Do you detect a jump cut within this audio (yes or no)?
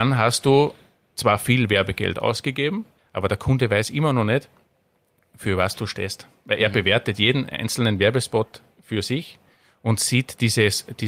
yes